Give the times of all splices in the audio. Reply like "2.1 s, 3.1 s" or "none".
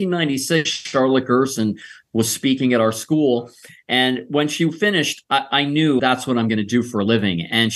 6.0 s